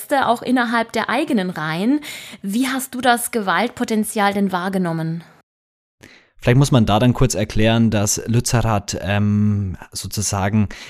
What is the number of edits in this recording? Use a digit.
0